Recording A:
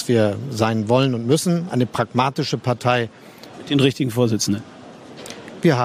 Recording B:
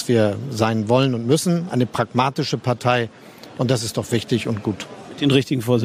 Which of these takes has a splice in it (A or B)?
A